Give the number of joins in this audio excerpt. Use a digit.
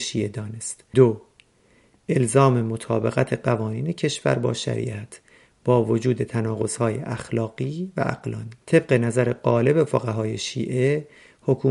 2